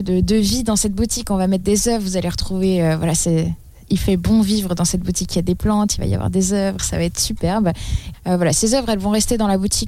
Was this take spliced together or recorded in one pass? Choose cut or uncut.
cut